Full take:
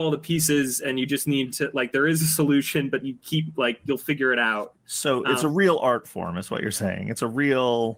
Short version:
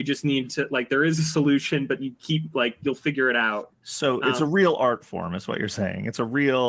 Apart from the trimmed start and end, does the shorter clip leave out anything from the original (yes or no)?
no